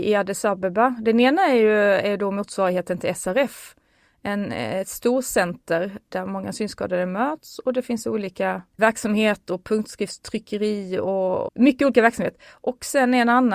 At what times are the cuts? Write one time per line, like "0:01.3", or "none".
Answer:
0:11.5